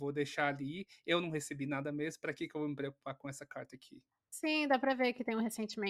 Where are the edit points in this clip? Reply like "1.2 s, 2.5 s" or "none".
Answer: none